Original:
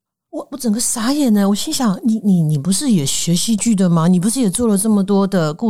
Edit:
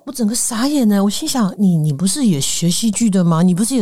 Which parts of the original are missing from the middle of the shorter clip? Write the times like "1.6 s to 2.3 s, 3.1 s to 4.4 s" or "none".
2.0 s to 2.2 s